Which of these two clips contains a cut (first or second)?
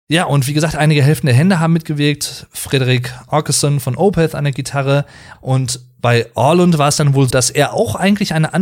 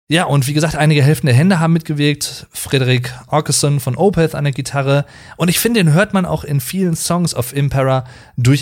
first